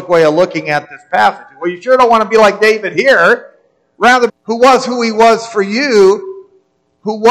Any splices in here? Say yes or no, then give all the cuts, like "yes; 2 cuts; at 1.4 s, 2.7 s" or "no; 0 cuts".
yes; 1 cut; at 4.3 s